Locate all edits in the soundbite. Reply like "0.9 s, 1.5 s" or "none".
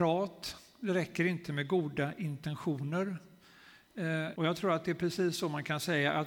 4.3 s